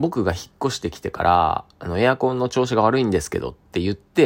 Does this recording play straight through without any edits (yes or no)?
yes